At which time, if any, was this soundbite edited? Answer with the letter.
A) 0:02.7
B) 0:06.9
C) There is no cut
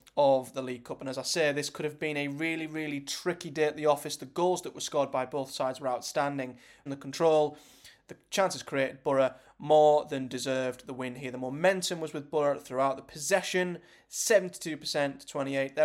B